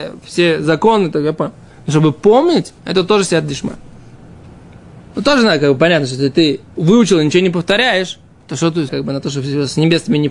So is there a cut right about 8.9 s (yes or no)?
yes